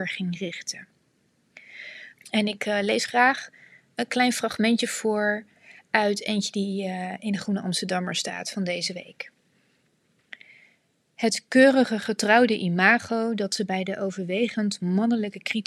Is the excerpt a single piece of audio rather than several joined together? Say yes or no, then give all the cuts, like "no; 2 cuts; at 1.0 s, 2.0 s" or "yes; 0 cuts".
no; 1 cut; at 2.2 s